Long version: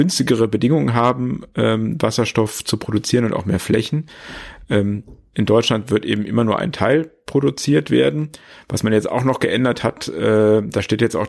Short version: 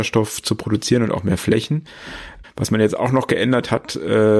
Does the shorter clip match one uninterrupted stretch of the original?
no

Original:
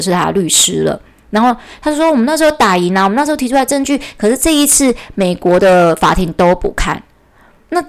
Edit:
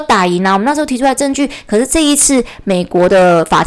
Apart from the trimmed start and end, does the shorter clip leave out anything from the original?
no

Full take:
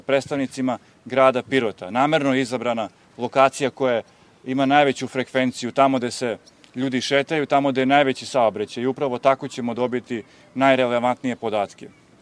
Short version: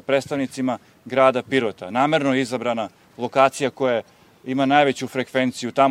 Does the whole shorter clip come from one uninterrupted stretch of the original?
yes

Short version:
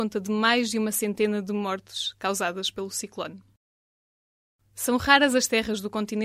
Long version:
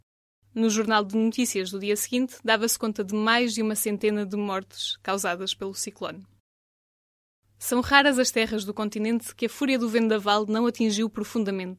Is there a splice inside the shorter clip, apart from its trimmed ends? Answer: no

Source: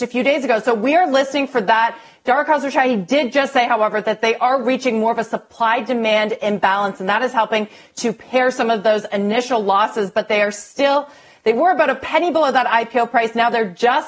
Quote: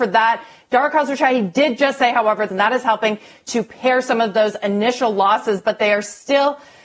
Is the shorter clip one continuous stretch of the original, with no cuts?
no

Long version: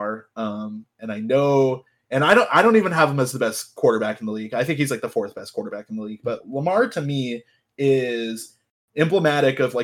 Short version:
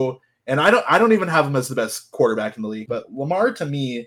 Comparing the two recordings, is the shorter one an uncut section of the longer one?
no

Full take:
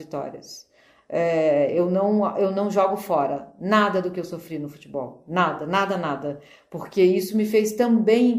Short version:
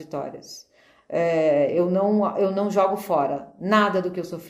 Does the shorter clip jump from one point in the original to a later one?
no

